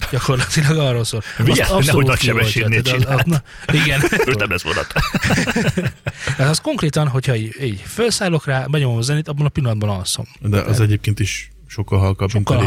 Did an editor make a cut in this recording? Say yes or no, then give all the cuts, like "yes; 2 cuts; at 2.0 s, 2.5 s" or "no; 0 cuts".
yes; 2 cuts; at 4.3 s, 8.7 s